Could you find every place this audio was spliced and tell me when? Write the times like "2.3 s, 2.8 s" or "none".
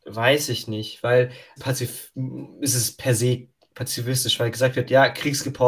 1.6 s